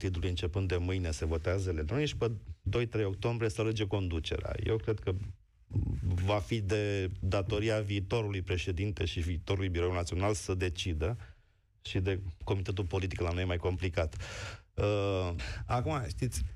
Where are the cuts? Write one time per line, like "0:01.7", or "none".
0:15.4